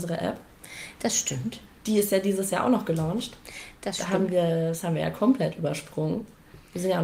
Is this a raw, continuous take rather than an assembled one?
yes; 0 cuts

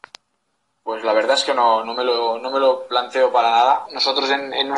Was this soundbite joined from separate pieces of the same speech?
yes; 2 cuts; at 1.8 s, 3.8 s

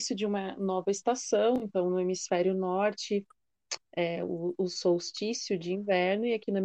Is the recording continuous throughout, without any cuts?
no; 1 cut; at 3.8 s

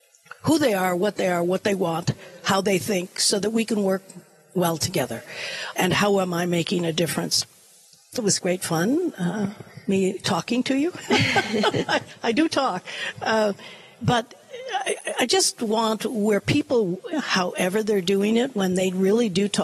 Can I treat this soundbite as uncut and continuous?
no; 3 cuts; at 5.7 s, 8.2 s, 17.1 s

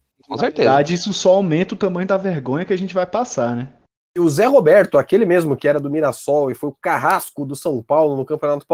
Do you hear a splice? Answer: yes; 1 cut; at 4.0 s

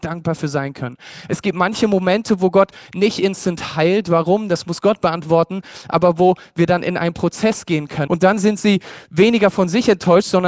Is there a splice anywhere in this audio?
yes; 1 cut; at 8.1 s

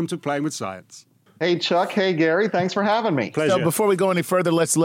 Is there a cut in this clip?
no; 0 cuts

